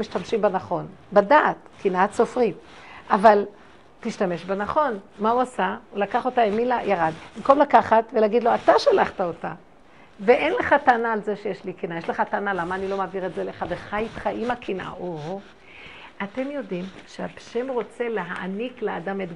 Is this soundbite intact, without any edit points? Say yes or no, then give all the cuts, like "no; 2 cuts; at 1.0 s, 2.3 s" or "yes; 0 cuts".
yes; 0 cuts